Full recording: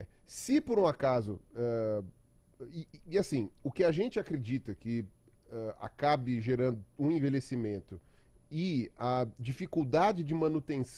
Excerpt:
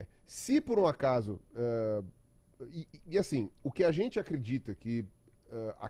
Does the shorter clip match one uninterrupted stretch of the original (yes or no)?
yes